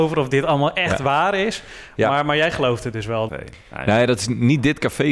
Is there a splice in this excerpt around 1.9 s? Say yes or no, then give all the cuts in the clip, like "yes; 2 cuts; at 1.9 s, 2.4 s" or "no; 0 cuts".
no; 1 cut; at 3.3 s